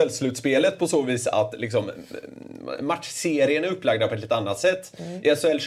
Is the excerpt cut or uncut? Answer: uncut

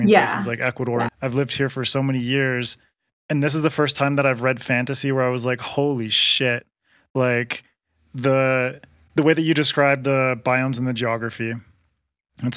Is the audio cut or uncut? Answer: cut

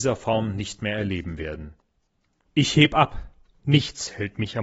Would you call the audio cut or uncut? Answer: cut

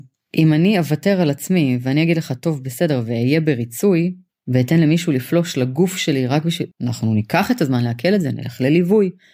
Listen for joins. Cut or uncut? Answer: cut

